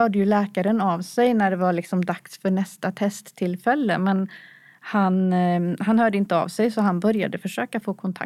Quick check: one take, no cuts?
yes; 0 cuts

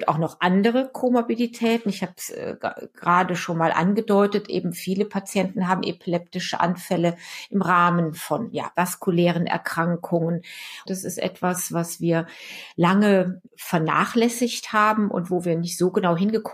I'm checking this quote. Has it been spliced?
yes; 3 cuts; at 8.7 s, 10.9 s, 13.5 s

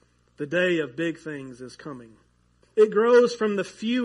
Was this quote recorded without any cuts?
no; 1 cut; at 2.6 s

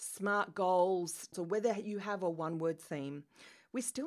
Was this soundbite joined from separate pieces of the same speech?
yes; 1 cut; at 1.3 s

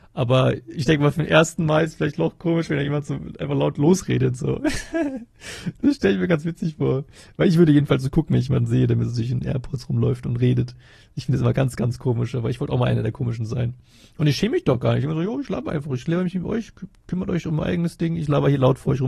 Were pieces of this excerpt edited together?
no; 0 cuts

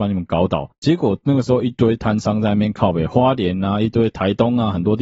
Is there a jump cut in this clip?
no; 0 cuts

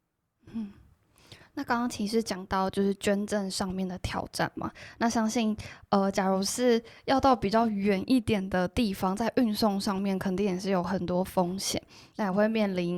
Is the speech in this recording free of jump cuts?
yes; 0 cuts

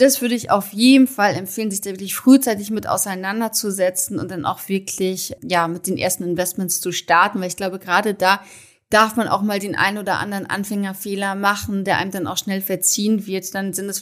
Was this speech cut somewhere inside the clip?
no; 0 cuts

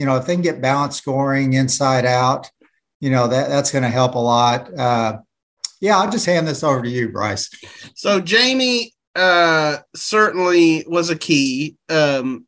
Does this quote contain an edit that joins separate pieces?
no; 0 cuts

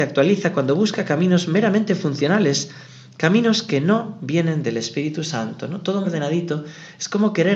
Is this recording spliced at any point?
yes; 1 cut; at 6.0 s

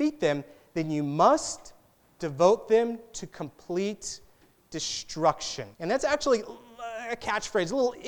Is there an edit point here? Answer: yes; 1 cut; at 5.7 s

